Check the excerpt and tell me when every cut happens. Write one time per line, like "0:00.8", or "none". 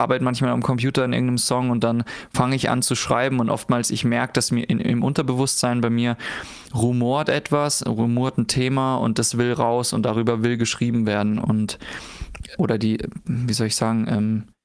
0:11.4
0:12.6